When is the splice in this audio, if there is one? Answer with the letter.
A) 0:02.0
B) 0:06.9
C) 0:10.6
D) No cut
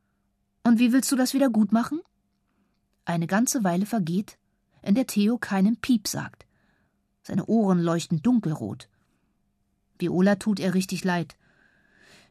D